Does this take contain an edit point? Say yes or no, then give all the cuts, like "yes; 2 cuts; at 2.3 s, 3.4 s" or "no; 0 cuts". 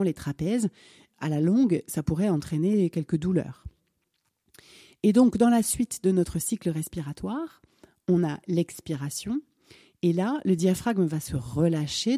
no; 0 cuts